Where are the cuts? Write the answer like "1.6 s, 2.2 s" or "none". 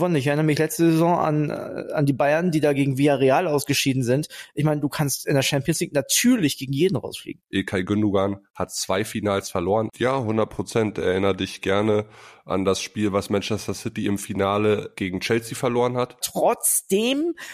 7.5 s, 9.9 s, 16.2 s